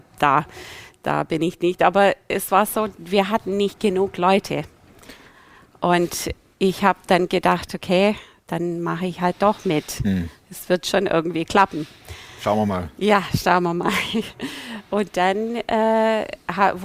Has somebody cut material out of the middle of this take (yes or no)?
no